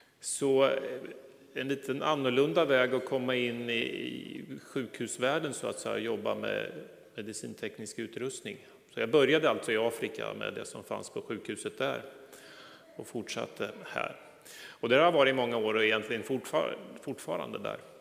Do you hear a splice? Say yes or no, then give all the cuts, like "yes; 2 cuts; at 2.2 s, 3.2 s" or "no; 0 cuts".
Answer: no; 0 cuts